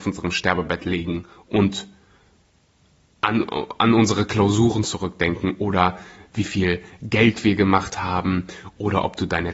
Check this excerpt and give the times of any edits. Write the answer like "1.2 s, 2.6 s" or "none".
none